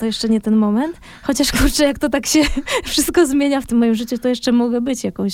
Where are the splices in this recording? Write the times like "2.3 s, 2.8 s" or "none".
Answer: none